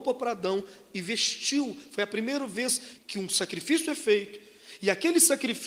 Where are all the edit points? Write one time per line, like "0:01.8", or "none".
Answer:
0:03.0